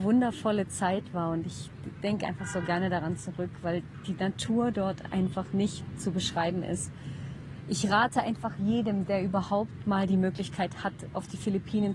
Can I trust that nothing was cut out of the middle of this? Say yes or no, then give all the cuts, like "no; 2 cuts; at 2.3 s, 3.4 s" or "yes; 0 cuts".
yes; 0 cuts